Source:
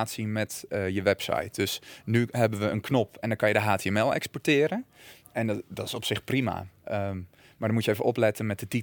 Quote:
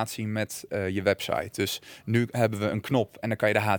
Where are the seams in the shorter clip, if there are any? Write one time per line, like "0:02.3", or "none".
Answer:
none